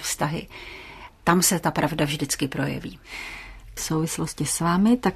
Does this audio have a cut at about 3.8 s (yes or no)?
yes